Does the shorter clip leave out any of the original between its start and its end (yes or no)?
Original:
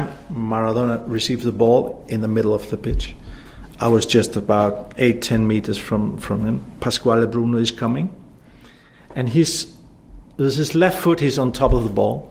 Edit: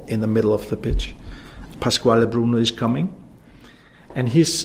yes